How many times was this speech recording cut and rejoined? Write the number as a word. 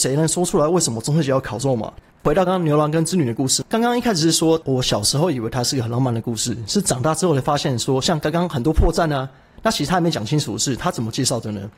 two